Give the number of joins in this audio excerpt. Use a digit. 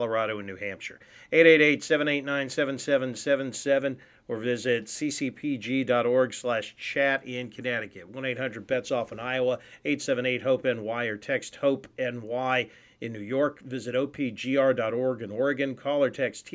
1